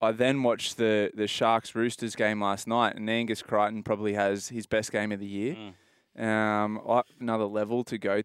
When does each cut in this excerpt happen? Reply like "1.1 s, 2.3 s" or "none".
7.2 s